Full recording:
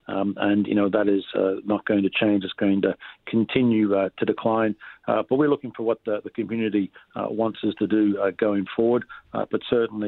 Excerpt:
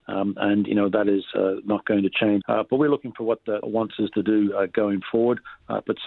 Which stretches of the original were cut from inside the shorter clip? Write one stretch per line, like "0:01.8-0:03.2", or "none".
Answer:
0:02.4-0:05.0
0:06.2-0:07.3